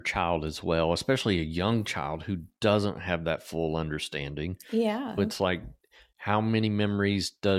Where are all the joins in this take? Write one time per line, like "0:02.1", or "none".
0:05.2